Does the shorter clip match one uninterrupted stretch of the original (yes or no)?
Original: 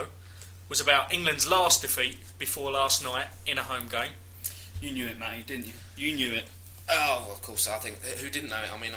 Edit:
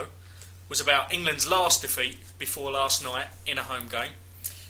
yes